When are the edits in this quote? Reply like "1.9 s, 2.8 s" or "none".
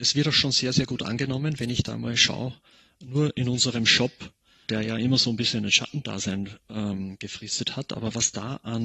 4.7 s